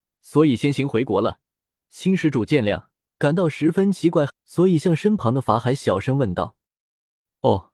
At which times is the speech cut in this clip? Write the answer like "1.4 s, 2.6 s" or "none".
3.1 s, 4.3 s